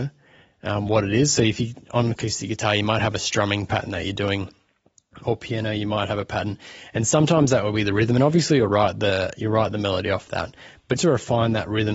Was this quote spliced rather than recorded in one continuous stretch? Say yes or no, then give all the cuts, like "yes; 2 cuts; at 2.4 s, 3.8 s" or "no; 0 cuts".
yes; 1 cut; at 11.0 s